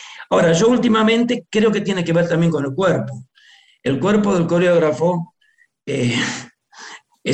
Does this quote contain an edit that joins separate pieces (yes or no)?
no